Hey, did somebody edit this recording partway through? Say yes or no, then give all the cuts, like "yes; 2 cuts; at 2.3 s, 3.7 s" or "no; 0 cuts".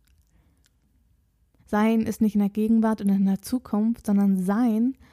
yes; 1 cut; at 1.6 s